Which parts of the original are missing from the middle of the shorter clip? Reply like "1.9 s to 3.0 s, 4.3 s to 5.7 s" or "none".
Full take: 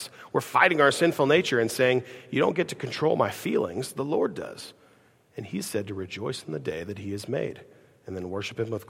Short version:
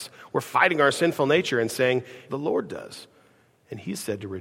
2.3 s to 3.9 s